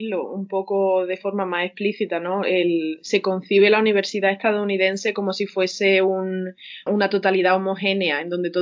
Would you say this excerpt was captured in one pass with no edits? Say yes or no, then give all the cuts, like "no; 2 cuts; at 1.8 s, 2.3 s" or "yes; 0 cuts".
no; 1 cut; at 6.9 s